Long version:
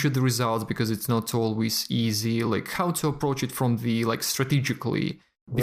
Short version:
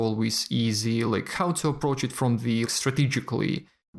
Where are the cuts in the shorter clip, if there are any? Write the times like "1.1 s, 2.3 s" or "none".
2.6 s